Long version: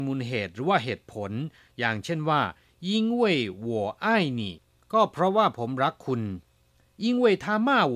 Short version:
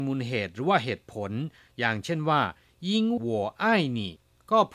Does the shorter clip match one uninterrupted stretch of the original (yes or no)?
no